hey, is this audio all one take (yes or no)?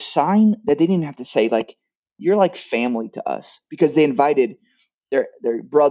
yes